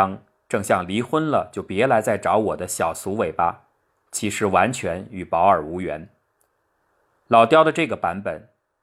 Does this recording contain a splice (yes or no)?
no